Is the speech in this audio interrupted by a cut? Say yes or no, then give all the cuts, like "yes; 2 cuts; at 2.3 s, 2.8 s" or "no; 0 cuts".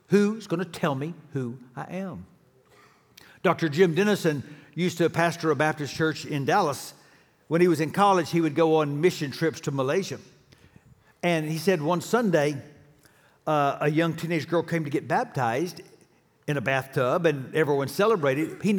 no; 0 cuts